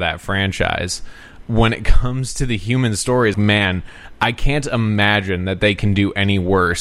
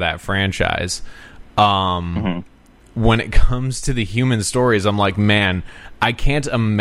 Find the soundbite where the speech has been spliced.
first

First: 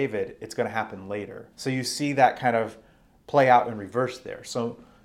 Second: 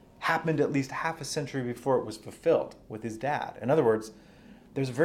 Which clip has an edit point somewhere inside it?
first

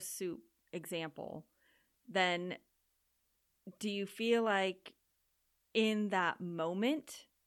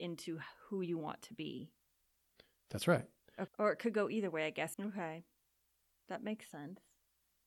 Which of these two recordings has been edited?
second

